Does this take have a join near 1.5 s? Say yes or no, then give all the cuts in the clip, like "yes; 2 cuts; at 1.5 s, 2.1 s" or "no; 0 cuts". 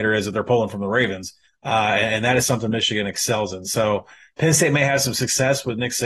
yes; 1 cut; at 1.5 s